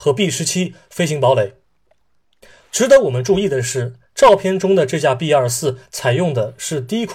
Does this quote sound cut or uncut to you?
uncut